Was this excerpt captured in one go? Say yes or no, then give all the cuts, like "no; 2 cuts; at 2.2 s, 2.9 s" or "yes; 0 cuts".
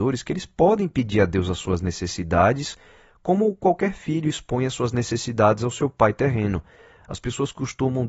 no; 1 cut; at 7.0 s